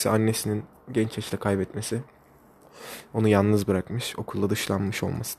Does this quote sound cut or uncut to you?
uncut